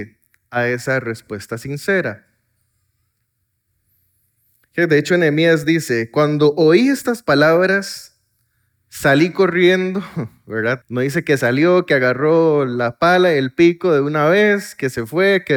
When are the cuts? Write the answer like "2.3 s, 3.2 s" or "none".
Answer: 10.8 s